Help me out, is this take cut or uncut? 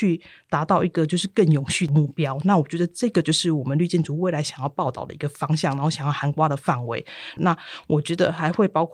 cut